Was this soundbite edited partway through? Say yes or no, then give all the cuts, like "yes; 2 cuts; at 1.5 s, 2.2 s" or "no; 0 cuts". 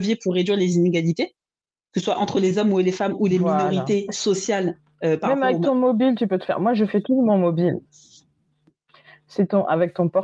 no; 0 cuts